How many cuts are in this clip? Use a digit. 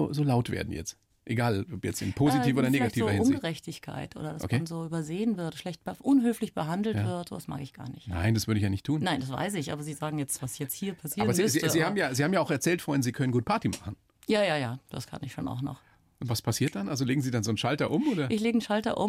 0